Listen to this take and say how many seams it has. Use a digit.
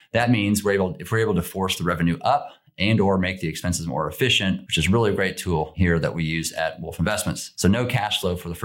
2